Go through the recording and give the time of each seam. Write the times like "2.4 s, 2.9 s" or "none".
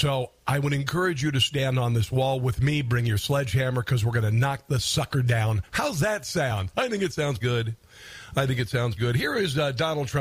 7.4 s, 9.0 s